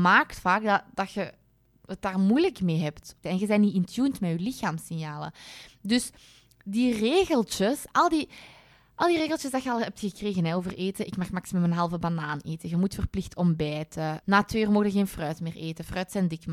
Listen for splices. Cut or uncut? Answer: cut